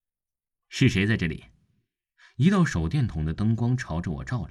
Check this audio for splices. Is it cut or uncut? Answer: uncut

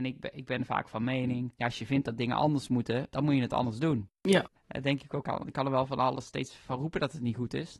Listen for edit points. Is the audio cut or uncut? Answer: uncut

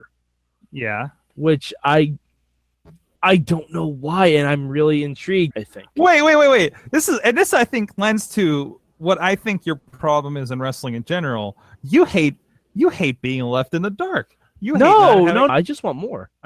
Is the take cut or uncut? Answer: cut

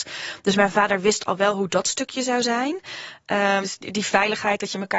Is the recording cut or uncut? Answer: cut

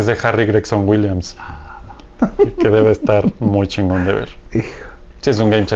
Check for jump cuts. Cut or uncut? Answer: cut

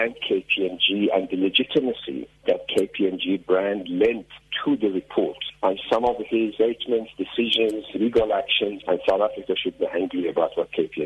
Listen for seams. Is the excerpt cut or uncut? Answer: cut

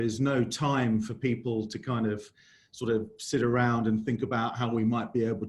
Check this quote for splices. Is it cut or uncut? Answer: uncut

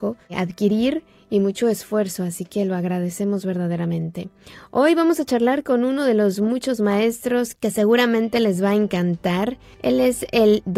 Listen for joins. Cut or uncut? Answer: uncut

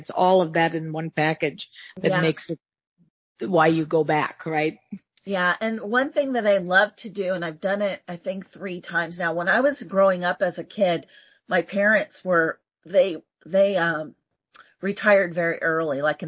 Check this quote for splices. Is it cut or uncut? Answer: uncut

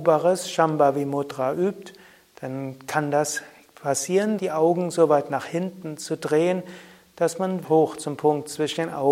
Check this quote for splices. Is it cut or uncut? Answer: cut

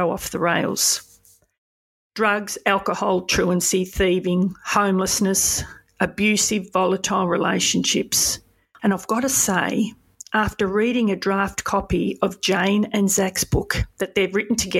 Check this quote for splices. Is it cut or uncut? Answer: cut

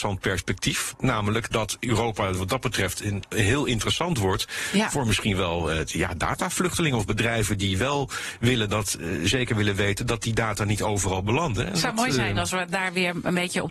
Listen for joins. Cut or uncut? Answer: uncut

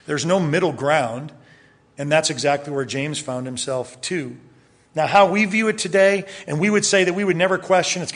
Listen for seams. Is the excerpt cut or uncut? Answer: uncut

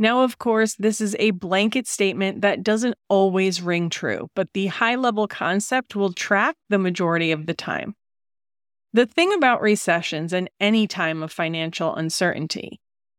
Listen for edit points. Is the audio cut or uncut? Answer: uncut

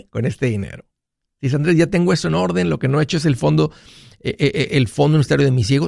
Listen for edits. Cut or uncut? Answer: uncut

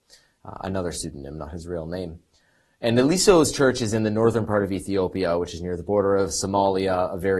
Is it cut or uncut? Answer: uncut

